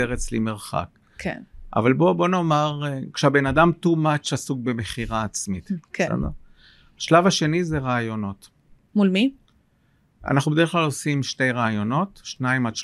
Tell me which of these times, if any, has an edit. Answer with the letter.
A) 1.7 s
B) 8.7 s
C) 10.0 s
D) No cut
D